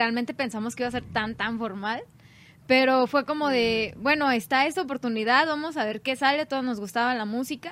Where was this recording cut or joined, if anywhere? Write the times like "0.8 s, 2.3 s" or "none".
none